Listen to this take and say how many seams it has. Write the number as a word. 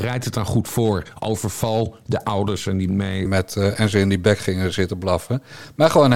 one